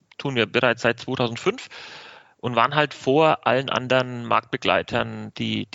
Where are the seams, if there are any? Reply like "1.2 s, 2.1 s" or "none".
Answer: none